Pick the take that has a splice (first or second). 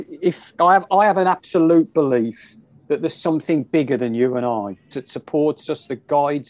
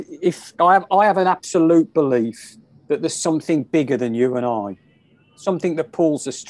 first